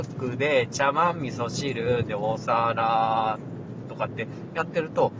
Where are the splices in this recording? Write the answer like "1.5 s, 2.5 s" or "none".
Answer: 3.8 s